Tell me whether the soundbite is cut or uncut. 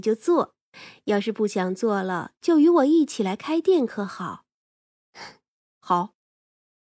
uncut